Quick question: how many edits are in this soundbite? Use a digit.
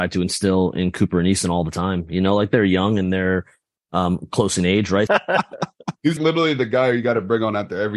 2